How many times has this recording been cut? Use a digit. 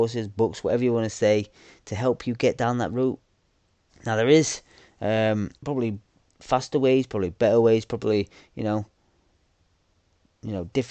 2